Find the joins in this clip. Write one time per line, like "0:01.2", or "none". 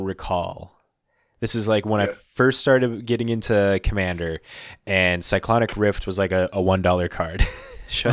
none